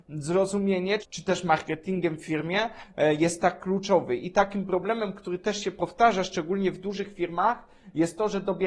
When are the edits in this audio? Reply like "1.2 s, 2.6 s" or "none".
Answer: 1.0 s